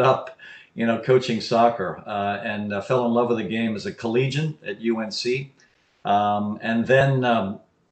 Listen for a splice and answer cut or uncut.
uncut